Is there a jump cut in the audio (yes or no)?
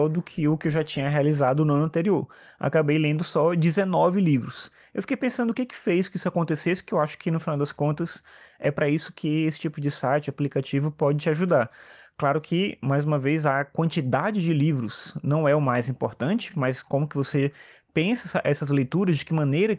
no